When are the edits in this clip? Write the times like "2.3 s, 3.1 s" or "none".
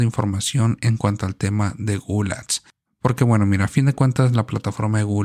none